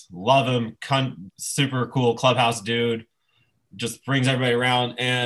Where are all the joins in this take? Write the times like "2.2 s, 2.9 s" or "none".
1.3 s